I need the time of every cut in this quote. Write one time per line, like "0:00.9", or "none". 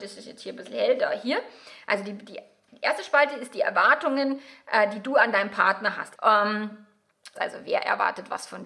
0:06.2
0:07.4